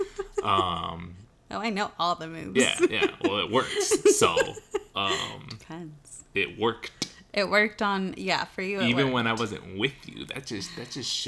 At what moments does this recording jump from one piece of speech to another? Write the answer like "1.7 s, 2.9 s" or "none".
none